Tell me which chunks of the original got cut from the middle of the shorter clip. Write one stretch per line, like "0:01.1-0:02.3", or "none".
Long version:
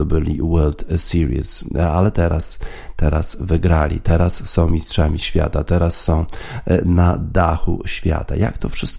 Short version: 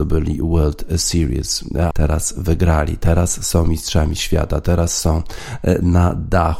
0:01.9-0:02.9